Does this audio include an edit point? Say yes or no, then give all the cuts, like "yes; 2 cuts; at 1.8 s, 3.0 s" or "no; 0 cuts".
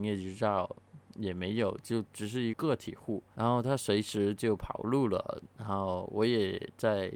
yes; 2 cuts; at 2.5 s, 5.5 s